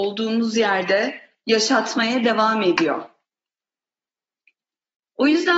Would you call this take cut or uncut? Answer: uncut